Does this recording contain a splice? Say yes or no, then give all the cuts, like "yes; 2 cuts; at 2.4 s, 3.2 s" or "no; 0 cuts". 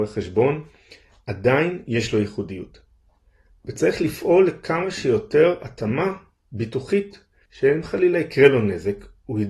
yes; 1 cut; at 7.4 s